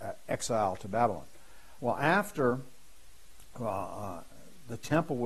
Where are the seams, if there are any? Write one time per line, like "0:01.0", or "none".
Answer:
0:01.8